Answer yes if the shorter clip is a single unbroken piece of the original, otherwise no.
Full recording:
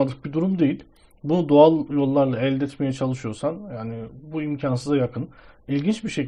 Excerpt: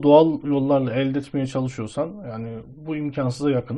yes